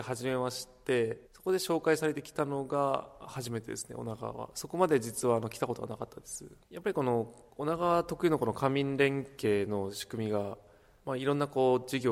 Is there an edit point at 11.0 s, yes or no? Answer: no